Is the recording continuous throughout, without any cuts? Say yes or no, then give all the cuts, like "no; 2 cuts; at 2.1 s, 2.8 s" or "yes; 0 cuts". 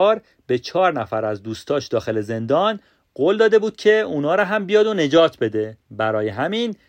no; 1 cut; at 5.8 s